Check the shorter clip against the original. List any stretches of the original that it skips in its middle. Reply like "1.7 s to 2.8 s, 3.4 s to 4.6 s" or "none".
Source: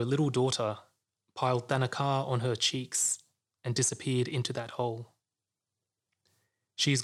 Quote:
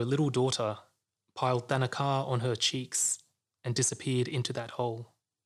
none